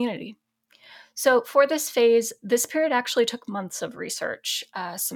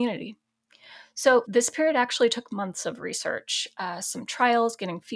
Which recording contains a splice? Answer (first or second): second